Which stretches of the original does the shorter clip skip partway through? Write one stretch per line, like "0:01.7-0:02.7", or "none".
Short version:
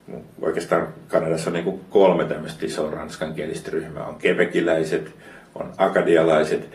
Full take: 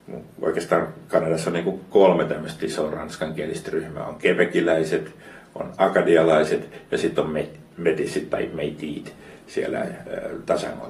none